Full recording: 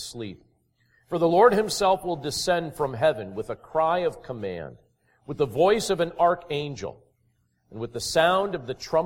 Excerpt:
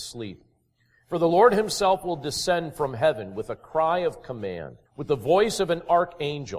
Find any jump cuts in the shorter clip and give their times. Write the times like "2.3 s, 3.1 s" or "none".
4.9 s